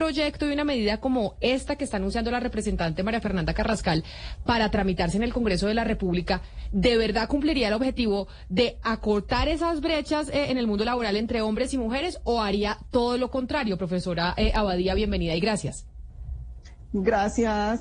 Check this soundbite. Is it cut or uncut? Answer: uncut